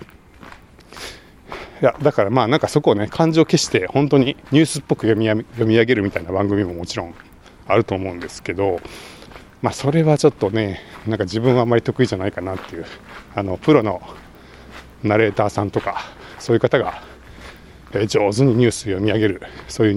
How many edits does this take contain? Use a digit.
1